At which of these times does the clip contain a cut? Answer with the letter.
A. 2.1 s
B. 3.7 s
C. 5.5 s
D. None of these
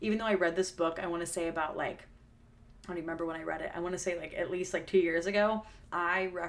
D